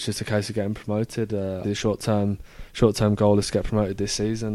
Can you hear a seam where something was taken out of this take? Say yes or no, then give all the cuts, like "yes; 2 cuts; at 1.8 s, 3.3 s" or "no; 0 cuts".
yes; 1 cut; at 1.6 s